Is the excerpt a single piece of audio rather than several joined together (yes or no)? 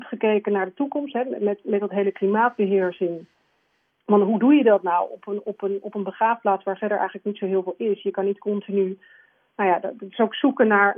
yes